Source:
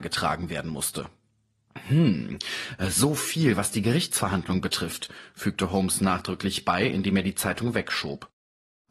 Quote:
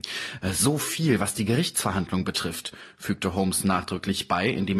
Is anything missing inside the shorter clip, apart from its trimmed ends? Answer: no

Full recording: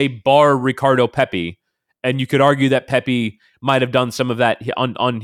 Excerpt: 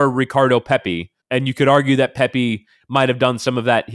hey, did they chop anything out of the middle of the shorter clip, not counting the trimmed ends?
yes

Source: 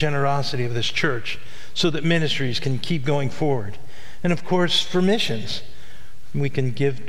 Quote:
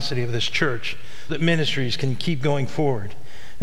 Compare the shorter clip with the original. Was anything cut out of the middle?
yes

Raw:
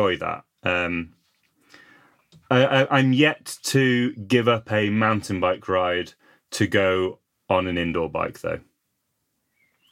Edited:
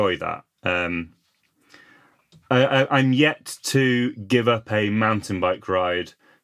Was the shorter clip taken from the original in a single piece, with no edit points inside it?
yes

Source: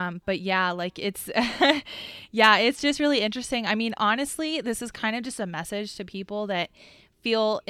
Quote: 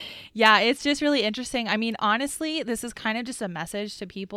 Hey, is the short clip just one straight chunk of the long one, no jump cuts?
yes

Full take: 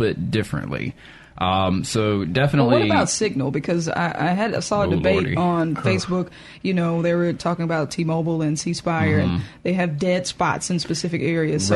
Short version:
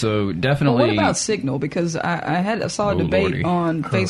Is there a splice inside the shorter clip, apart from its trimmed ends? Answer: no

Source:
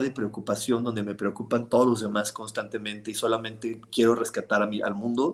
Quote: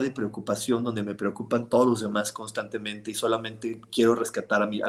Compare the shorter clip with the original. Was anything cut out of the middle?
no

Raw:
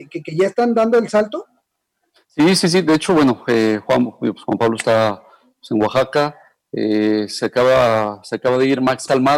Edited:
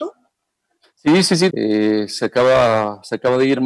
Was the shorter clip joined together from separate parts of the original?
yes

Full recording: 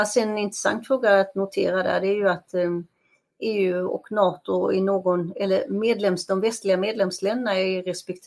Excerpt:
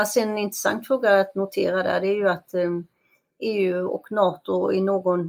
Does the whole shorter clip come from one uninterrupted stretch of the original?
yes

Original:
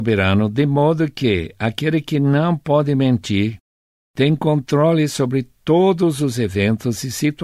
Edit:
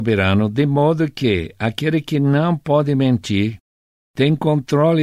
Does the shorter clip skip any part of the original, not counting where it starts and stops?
no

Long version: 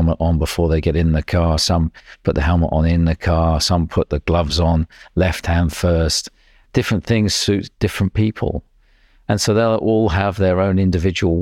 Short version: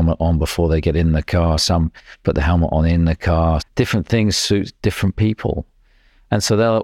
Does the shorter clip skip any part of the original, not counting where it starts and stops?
yes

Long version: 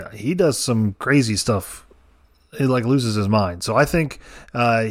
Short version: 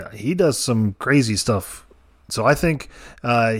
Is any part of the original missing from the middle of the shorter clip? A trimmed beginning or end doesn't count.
yes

